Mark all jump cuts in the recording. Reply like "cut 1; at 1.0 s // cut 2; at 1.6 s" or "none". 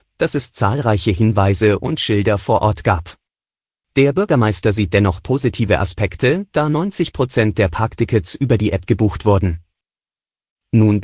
cut 1; at 3.8 s